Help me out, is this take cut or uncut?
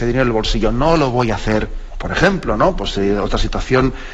cut